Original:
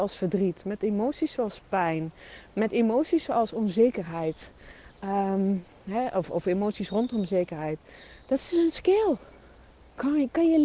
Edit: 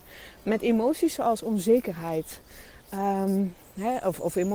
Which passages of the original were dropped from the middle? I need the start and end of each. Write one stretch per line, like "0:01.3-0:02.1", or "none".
none